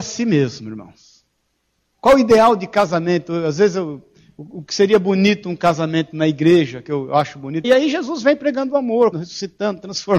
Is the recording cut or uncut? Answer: cut